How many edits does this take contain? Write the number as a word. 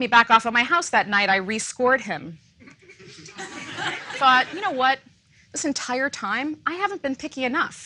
zero